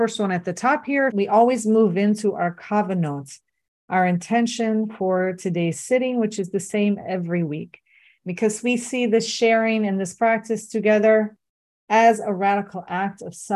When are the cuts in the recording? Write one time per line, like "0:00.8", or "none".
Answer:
0:01.1